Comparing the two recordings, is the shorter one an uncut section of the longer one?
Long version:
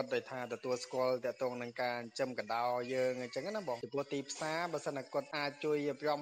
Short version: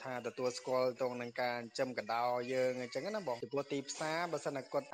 no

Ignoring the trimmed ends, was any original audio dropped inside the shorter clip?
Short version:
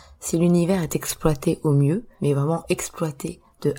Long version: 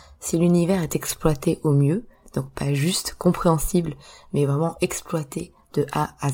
yes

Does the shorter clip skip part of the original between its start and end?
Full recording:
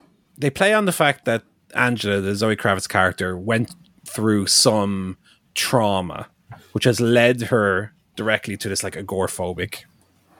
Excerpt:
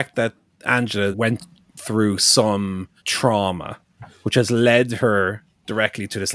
yes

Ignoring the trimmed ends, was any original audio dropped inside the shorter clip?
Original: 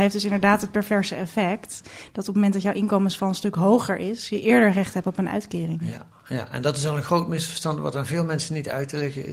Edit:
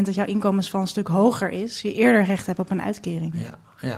no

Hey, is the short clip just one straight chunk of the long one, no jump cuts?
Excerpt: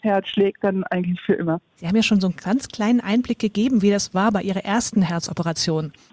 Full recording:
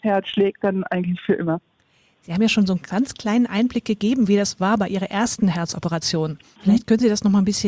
no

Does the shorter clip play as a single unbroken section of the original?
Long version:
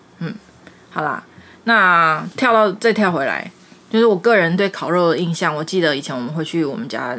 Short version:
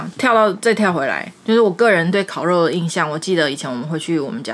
no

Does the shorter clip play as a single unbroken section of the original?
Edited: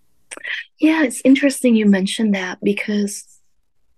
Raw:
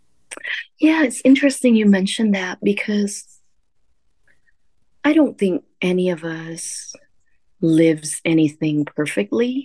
yes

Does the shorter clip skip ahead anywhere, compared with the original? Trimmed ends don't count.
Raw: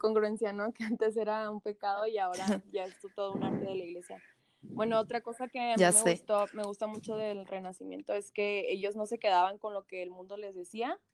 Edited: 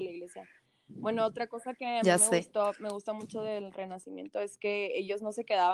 no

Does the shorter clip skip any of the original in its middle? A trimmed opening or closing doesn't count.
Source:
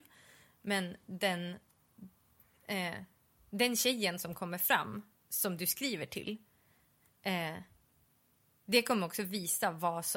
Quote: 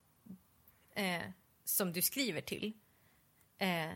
yes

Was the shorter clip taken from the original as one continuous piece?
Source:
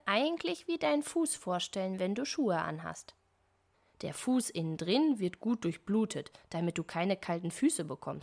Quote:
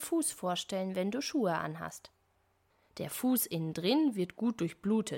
yes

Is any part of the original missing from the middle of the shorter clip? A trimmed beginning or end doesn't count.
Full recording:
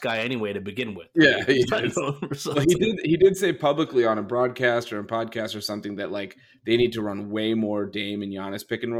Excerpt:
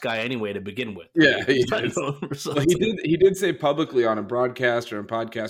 no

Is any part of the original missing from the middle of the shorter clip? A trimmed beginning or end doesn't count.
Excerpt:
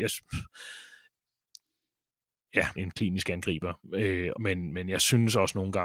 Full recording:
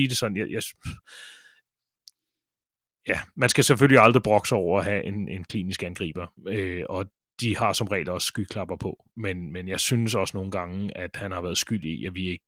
yes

